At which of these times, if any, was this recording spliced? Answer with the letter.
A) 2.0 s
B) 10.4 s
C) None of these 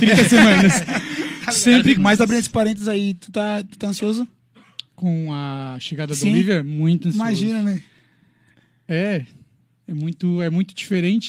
A